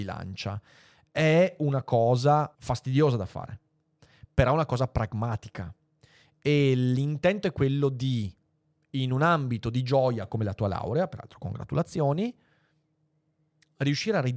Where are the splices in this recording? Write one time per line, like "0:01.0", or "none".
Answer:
0:02.5

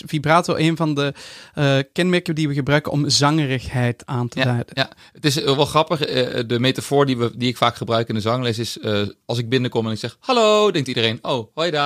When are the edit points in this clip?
none

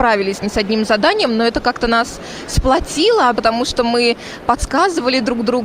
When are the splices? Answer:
0:03.3

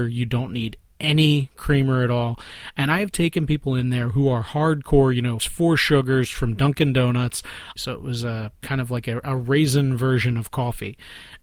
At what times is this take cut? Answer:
0:05.4
0:07.8

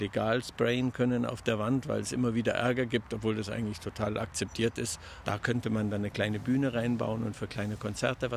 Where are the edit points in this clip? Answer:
0:05.2

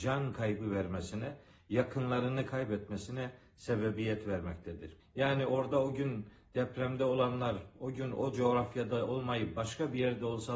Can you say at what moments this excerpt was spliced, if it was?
0:05.0

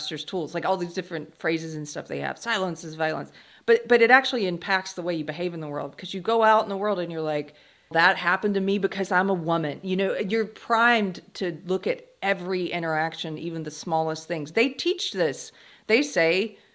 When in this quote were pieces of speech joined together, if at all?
0:07.9

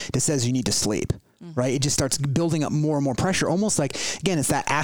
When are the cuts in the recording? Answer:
none

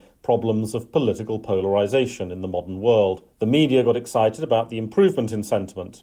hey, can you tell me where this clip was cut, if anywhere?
0:03.3

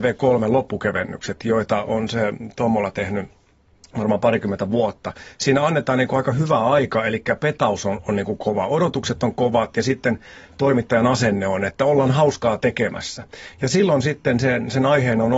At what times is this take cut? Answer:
none

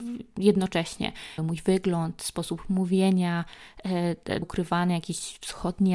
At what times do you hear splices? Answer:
0:01.4
0:04.4

